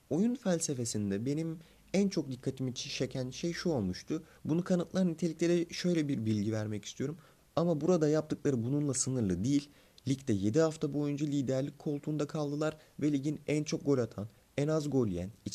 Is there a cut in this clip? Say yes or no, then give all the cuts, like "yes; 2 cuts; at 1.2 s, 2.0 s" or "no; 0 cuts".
yes; 2 cuts; at 4.4 s, 7.4 s